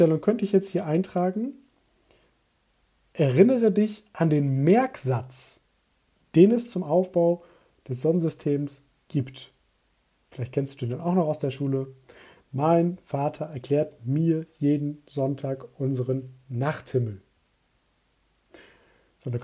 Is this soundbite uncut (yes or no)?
yes